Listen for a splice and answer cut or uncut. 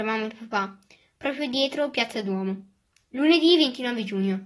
cut